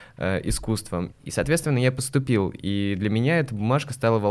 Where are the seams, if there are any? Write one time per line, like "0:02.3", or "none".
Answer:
0:01.1